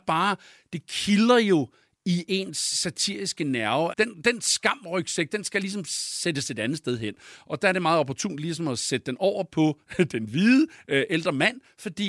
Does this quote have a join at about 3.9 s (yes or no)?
yes